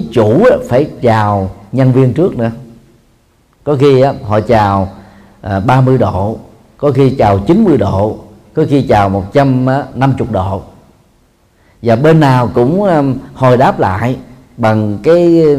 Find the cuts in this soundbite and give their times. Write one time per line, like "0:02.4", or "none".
none